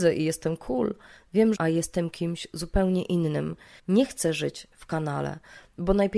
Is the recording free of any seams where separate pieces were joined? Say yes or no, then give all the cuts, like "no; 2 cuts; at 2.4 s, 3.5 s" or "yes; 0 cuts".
no; 2 cuts; at 1.5 s, 3.8 s